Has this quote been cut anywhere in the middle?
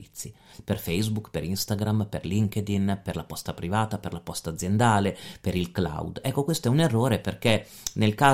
no; 0 cuts

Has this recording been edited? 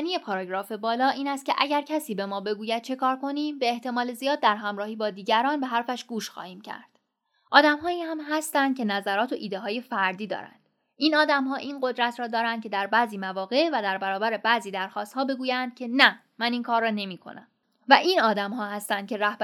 no; 0 cuts

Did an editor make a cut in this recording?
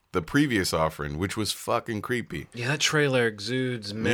no; 0 cuts

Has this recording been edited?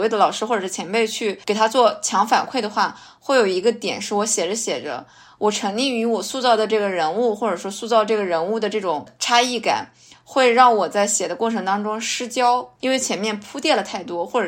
yes; 1 cut; at 12.8 s

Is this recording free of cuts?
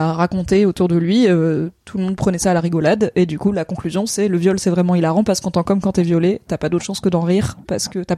yes; 0 cuts

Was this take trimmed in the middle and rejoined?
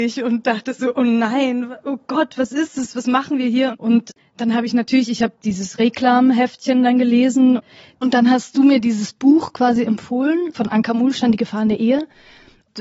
yes; 2 cuts; at 3.7 s, 10.5 s

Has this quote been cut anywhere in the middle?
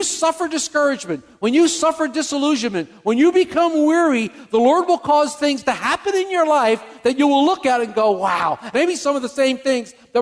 yes; 1 cut; at 8.7 s

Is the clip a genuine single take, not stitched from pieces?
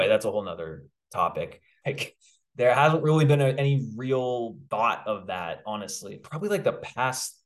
no; 3 cuts; at 1.8 s, 4.7 s, 6.2 s

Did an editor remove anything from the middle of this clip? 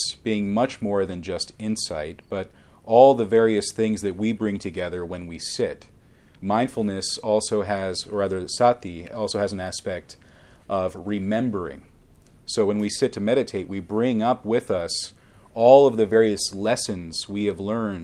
no; 0 cuts

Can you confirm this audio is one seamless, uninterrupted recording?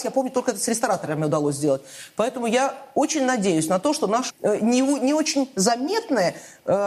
no; 1 cut; at 4.3 s

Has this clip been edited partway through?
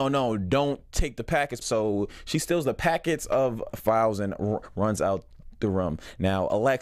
yes; 1 cut; at 1.6 s

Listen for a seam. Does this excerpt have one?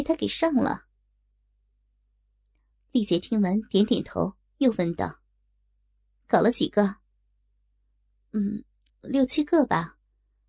yes; 2 cuts; at 2.7 s, 8.9 s

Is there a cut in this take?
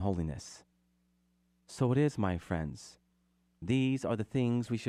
no; 0 cuts

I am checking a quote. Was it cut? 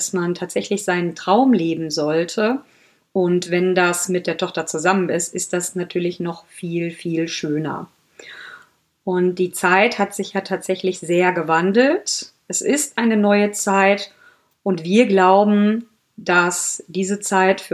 no; 0 cuts

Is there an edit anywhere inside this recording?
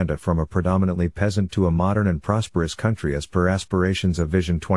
no; 0 cuts

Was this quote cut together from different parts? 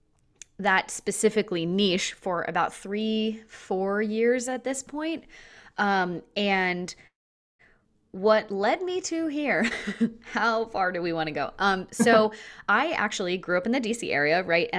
no; 0 cuts

